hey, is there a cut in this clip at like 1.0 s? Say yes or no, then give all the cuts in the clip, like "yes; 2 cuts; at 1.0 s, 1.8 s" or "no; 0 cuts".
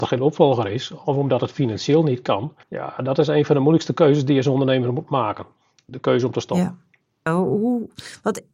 no; 2 cuts; at 2.6 s, 7.3 s